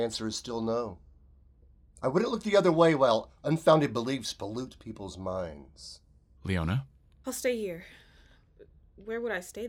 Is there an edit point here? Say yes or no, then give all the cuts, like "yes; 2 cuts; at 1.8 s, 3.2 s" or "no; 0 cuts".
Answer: no; 0 cuts